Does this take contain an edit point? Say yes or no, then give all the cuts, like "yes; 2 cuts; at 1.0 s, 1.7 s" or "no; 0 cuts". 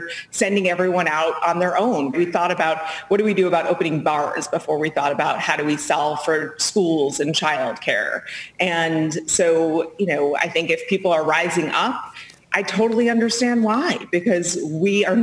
yes; 1 cut; at 2.1 s